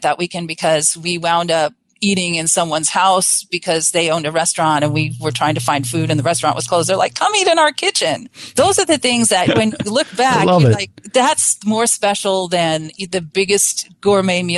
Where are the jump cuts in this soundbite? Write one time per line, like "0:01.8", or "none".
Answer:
none